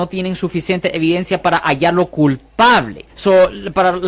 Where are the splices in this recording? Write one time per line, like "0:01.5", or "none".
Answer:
0:03.1